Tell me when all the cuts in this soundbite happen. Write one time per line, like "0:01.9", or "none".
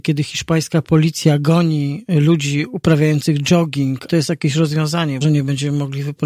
0:04.1
0:05.2